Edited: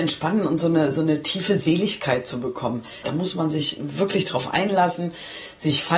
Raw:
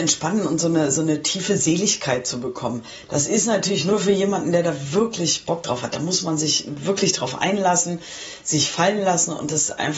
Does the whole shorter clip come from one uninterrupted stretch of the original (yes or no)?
no